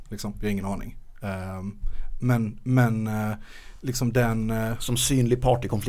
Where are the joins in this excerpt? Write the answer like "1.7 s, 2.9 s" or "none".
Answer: none